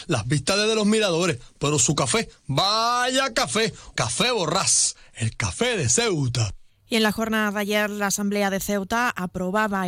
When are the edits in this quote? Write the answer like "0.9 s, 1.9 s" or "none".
3.9 s